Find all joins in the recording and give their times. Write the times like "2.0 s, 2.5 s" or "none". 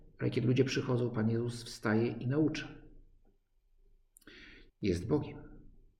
4.7 s